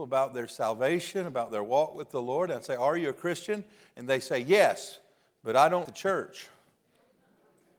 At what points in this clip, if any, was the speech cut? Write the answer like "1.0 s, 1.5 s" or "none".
5.9 s